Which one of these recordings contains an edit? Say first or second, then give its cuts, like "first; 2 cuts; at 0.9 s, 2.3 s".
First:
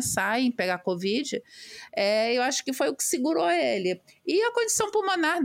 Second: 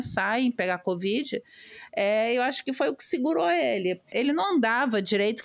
second; 1 cut; at 4.1 s